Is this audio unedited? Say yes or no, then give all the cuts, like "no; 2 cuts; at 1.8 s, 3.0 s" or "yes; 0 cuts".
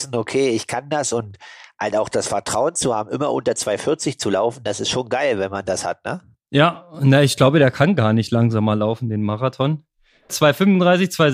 no; 1 cut; at 10.3 s